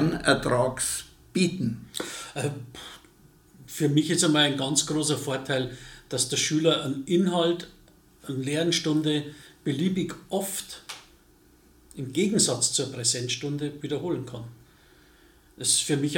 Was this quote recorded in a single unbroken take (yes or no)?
yes